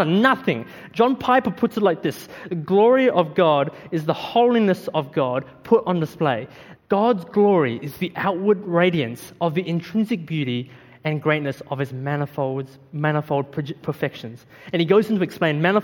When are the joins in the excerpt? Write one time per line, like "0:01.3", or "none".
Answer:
0:06.7